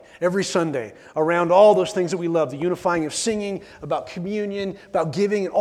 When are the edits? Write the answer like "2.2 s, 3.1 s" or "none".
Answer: none